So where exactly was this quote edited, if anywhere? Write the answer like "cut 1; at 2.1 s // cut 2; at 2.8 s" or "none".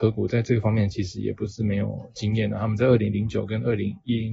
none